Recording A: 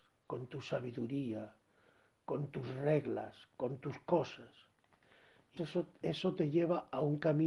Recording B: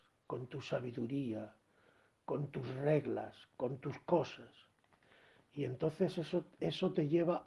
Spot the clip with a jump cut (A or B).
A